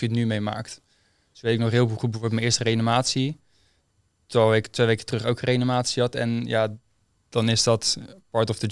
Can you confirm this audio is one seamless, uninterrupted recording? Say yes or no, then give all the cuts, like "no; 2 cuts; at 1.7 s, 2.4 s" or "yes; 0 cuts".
yes; 0 cuts